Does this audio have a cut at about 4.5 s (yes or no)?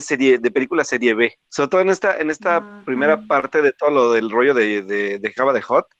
no